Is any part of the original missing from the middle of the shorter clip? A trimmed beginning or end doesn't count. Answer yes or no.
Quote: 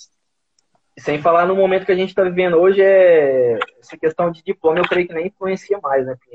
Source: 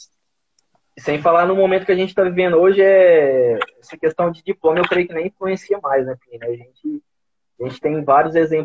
no